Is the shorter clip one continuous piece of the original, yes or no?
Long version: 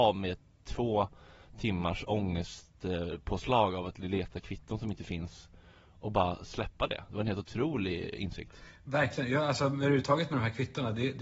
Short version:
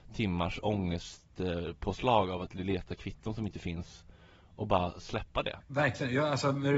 no